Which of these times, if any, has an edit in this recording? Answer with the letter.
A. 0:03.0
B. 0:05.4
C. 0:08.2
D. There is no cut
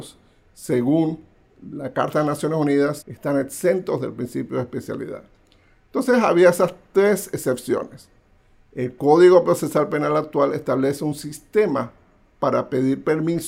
A